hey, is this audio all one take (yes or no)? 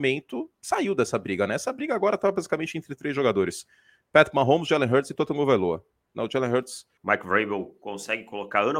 no